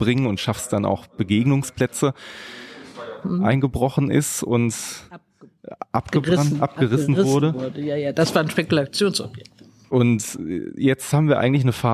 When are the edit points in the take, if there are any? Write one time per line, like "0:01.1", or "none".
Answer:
0:03.2

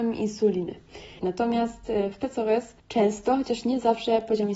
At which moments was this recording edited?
0:01.2
0:02.8

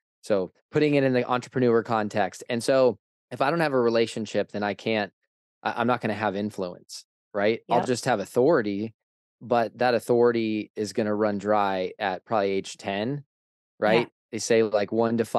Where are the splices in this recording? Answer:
none

